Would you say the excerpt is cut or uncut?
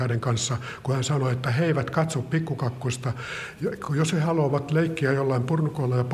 uncut